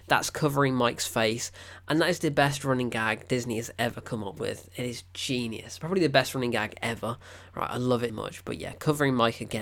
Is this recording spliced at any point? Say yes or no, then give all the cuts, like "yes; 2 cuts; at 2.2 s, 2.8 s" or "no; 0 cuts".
yes; 1 cut; at 8.1 s